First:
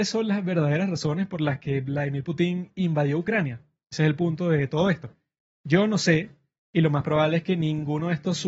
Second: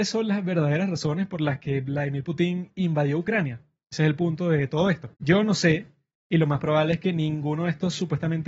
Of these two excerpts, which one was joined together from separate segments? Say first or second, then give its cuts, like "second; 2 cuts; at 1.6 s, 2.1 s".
second; 1 cut; at 5.1 s